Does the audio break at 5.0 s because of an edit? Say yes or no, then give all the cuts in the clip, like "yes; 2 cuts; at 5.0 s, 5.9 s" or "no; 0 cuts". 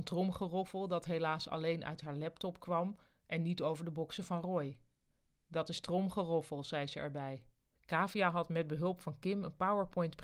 no; 1 cut; at 7.8 s